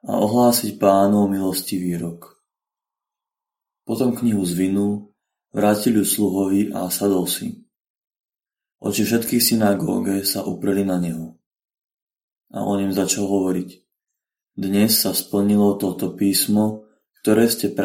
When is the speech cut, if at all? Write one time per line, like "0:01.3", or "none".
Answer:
none